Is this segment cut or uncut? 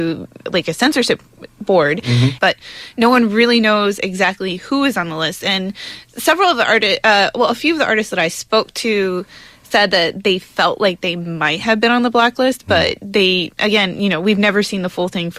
cut